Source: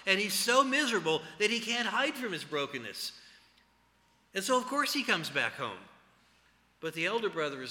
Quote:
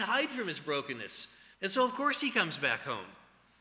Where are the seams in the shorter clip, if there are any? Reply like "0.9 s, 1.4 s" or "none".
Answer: 1.5 s